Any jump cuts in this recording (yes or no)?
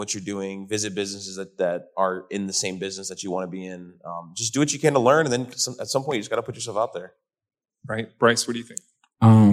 no